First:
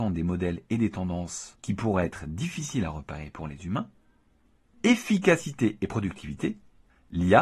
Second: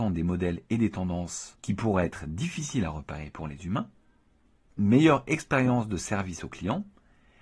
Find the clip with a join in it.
first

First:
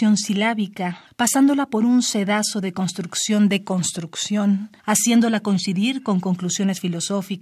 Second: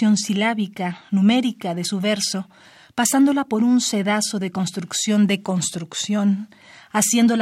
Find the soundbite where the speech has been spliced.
first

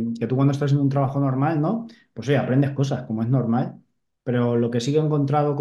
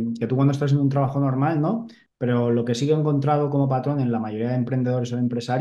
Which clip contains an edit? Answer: second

